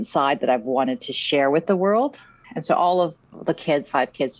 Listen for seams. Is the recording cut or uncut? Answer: cut